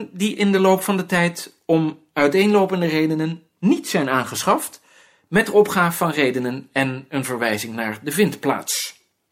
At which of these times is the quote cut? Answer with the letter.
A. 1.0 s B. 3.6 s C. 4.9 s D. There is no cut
D